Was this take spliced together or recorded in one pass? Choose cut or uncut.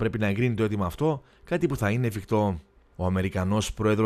cut